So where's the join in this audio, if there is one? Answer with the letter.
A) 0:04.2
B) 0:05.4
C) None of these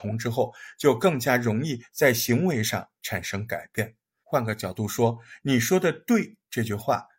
A